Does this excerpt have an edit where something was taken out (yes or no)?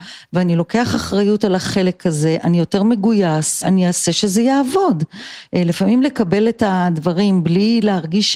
yes